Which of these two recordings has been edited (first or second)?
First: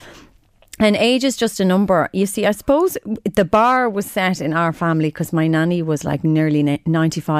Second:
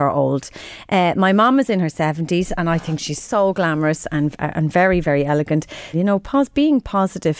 second